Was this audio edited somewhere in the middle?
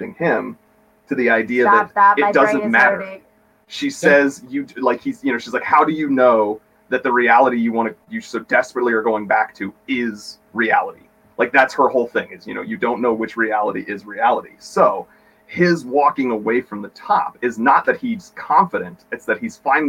no; 0 cuts

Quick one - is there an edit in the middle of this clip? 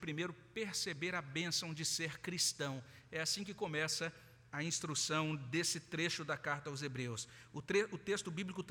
no; 0 cuts

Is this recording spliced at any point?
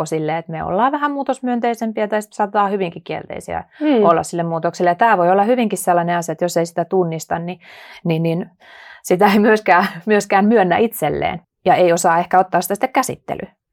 yes; 1 cut; at 11.4 s

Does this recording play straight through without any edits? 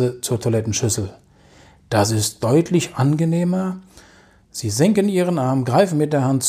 no; 1 cut; at 4.4 s

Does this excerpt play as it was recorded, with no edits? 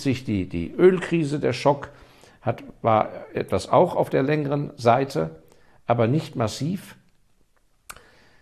yes; 0 cuts

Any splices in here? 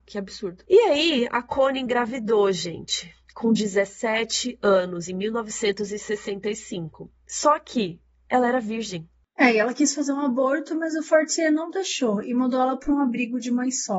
no; 0 cuts

